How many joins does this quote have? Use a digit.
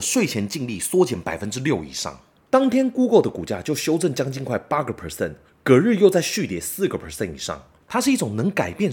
2